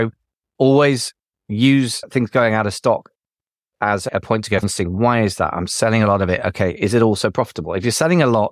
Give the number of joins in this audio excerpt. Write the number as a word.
one